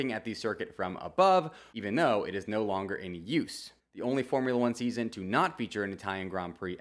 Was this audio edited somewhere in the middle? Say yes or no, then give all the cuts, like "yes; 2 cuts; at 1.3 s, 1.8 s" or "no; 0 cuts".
yes; 2 cuts; at 1.7 s, 3.8 s